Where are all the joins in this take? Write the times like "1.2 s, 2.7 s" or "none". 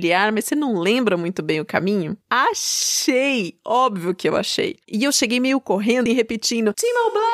2.2 s, 6.1 s